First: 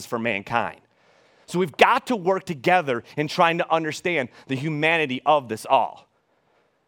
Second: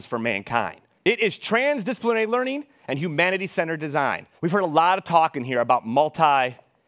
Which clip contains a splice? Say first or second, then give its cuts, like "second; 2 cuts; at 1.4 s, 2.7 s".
second; 2 cuts; at 1.0 s, 4.4 s